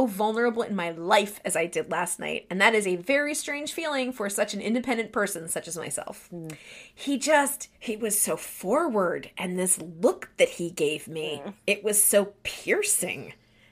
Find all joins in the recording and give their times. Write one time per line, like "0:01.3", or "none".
0:07.7